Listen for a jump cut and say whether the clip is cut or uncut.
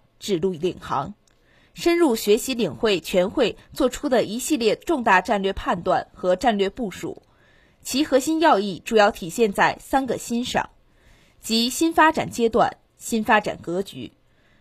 cut